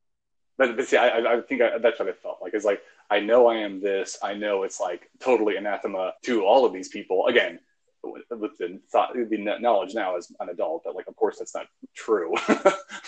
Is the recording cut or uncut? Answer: cut